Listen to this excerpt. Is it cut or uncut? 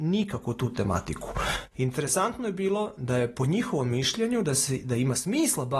cut